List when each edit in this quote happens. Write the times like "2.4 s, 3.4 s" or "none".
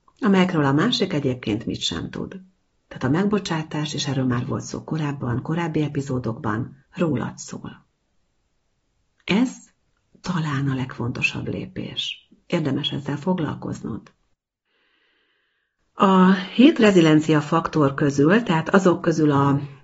6.8 s